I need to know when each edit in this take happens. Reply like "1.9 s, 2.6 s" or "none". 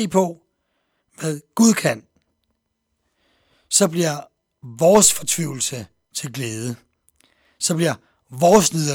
none